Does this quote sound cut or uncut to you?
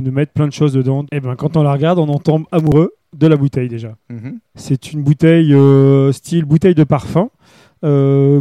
cut